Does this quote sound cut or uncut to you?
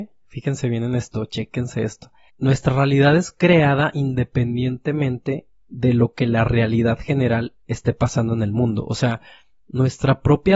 uncut